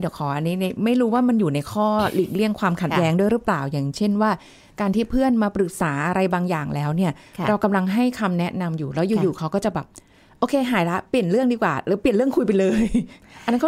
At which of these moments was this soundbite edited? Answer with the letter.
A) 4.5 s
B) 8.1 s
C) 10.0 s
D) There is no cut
D